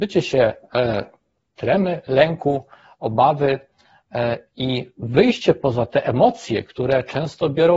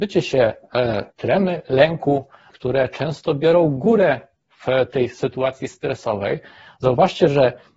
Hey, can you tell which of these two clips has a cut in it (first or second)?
second